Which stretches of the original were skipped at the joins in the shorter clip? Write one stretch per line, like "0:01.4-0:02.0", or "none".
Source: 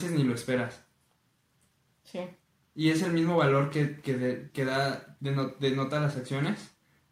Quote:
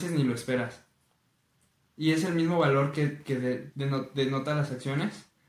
0:01.8-0:02.6
0:04.5-0:05.2